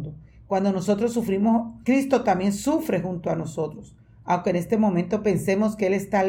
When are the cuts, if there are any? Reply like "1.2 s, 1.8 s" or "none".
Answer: none